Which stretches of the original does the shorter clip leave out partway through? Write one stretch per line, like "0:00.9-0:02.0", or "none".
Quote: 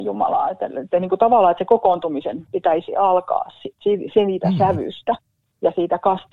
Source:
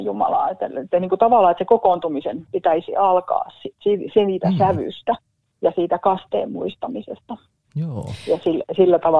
none